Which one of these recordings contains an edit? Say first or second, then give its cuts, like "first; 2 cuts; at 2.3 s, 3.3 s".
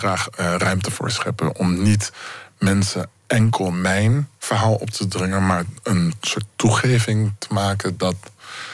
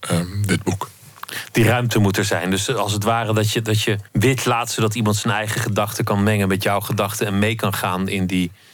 second; 1 cut; at 4.1 s